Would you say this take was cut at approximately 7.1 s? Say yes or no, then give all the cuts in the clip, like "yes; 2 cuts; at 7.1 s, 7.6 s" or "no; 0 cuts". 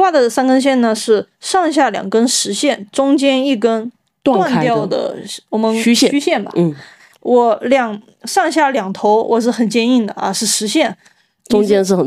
yes; 1 cut; at 7.1 s